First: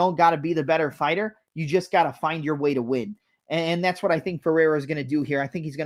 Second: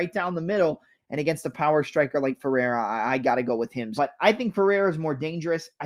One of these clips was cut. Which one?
second; 2 cuts; at 1.0 s, 4.0 s

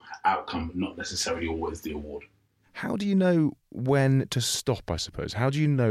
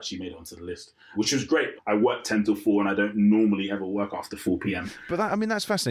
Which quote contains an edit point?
second; 1 cut; at 1.8 s

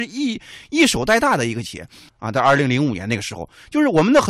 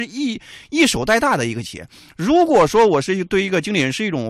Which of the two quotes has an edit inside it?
first; 1 cut; at 2.1 s

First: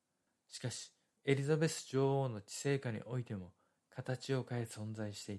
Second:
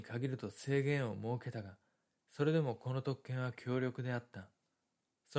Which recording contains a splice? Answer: first; 1 cut; at 1.1 s

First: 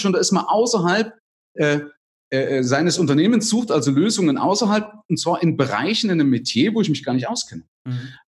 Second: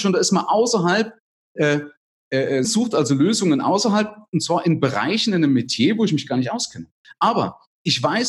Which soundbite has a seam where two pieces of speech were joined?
second; 2 cuts; at 2.6 s, 7.0 s

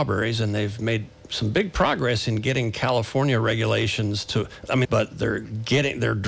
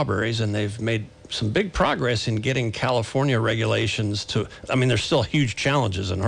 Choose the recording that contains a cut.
first; 1 cut; at 4.8 s

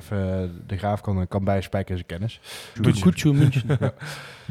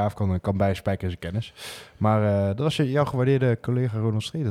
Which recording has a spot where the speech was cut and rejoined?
first; 1 cut; at 2.8 s

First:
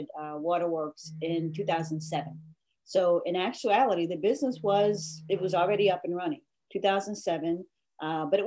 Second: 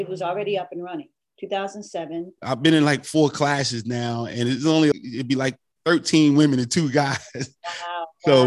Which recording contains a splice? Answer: second; 2 cuts; at 2.4 s, 4.9 s

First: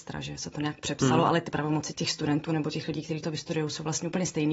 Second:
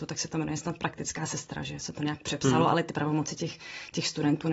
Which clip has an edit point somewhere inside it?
first; 1 cut; at 1.9 s

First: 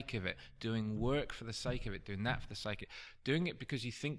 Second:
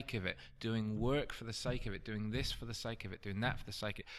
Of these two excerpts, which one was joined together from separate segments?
first; 1 cut; at 2.0 s

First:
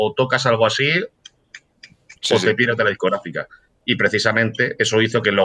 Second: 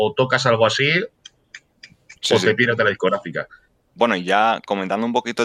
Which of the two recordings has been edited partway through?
second; 1 cut; at 3.8 s

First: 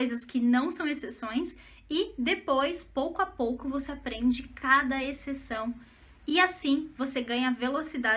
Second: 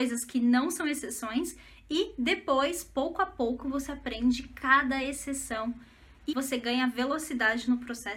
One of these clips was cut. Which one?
second; 1 cut; at 6.3 s

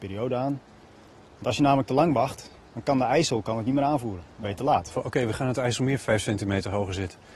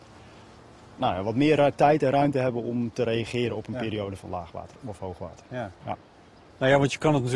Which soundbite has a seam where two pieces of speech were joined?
first; 1 cut; at 4.9 s

